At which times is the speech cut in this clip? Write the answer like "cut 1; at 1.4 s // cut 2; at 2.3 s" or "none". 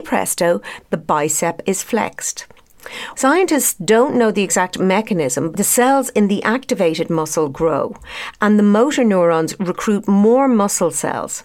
cut 1; at 3.1 s // cut 2; at 5.5 s